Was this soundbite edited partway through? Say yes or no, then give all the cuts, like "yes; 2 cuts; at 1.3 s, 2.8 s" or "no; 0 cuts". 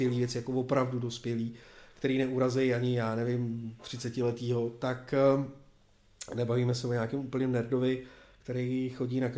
no; 0 cuts